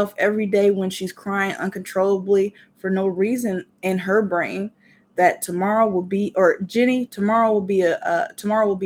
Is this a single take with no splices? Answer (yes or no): yes